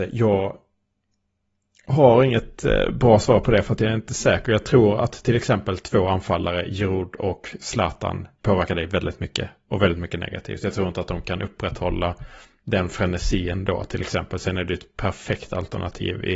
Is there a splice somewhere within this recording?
no; 0 cuts

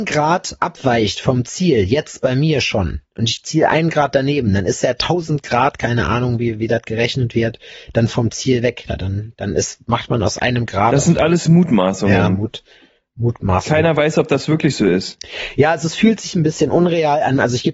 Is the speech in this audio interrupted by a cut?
yes; 1 cut; at 8.9 s

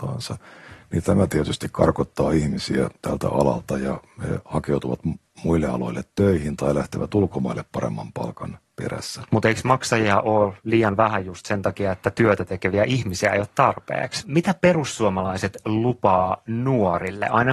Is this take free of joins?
no; 1 cut; at 14.2 s

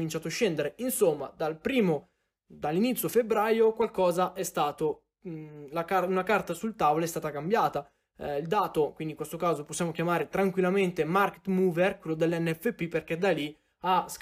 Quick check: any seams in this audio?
no; 0 cuts

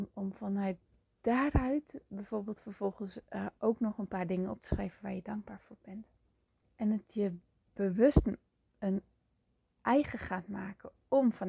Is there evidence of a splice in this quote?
yes; 1 cut; at 6.6 s

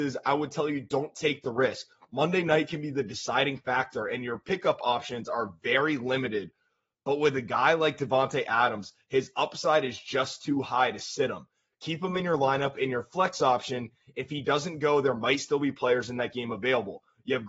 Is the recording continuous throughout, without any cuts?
yes; 0 cuts

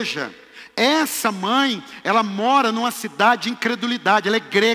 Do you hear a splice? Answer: no; 0 cuts

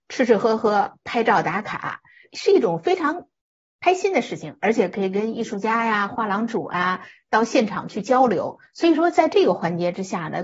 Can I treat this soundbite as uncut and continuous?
yes; 0 cuts

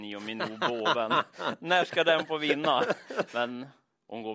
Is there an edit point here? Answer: yes; 1 cut; at 3.3 s

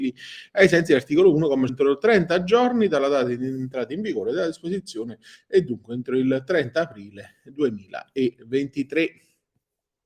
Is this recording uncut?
no; 1 cut; at 1.7 s

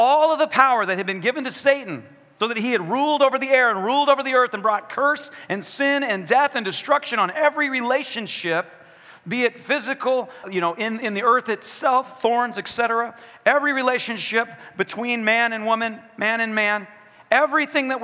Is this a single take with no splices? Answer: no; 2 cuts; at 2.4 s, 10.4 s

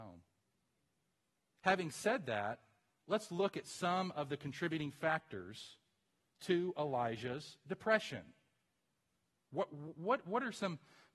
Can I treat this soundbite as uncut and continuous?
no; 1 cut; at 1.5 s

